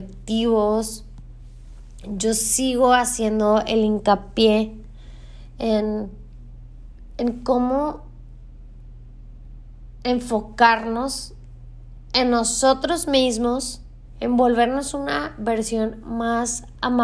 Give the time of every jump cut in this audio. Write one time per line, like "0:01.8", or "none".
0:14.1